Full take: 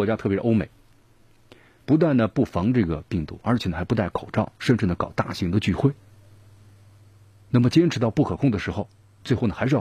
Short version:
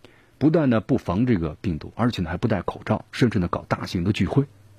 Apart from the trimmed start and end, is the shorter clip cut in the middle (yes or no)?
no